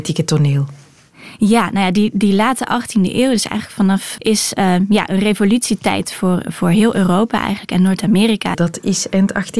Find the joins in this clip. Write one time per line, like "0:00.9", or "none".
0:04.2
0:08.5